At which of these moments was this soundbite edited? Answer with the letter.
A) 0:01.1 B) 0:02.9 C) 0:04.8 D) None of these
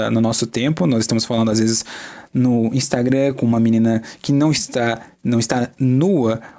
D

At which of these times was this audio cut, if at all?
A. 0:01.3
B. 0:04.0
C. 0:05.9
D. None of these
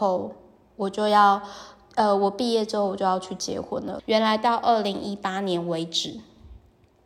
B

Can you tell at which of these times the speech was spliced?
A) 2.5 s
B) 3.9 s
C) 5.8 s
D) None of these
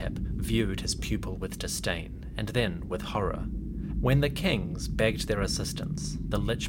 B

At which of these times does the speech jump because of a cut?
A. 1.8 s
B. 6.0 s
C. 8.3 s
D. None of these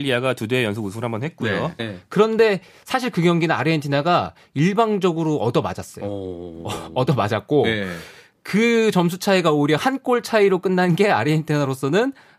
A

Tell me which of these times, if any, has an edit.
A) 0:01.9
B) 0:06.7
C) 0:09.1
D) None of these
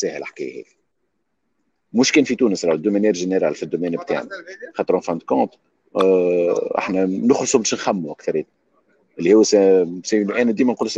D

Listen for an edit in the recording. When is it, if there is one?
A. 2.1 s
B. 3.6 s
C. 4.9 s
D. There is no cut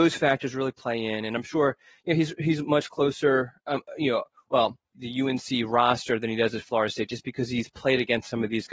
C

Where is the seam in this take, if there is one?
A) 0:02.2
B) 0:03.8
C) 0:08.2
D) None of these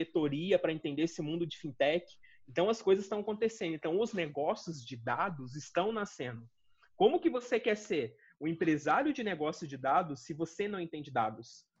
D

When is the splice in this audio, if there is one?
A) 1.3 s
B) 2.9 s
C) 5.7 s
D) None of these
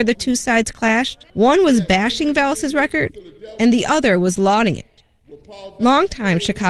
A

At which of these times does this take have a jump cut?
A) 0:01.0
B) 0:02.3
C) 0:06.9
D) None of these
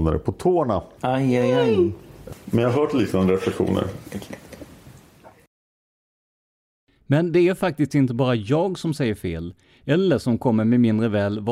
B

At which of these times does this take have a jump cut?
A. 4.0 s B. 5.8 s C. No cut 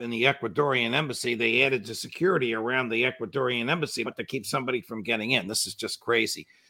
A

